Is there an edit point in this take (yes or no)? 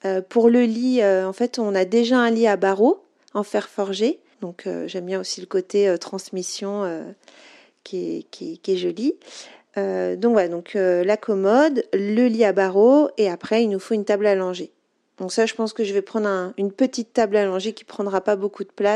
yes